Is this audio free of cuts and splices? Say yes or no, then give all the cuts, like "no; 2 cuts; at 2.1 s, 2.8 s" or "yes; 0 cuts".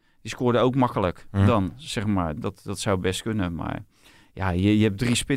no; 1 cut; at 2.4 s